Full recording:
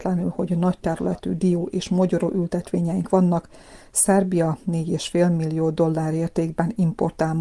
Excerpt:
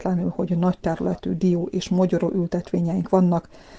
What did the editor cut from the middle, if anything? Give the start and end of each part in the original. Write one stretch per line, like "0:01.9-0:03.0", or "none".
none